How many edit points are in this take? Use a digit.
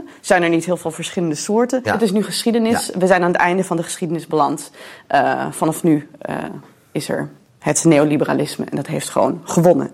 1